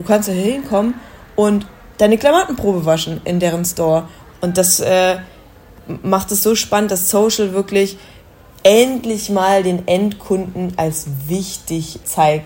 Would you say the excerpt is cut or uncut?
uncut